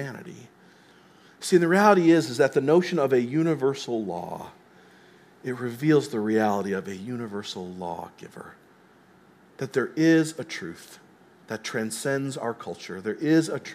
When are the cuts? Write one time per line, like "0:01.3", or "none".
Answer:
none